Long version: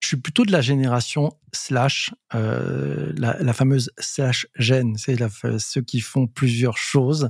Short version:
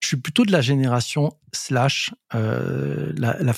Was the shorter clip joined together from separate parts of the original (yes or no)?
no